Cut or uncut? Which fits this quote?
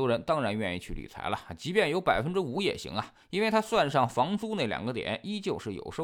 uncut